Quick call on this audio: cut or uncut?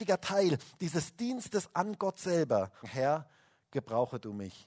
cut